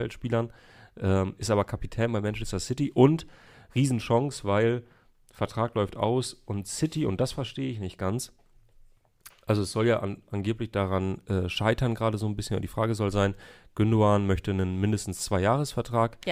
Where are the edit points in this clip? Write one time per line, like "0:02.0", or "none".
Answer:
none